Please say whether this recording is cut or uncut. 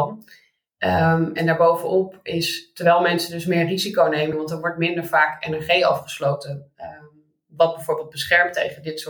cut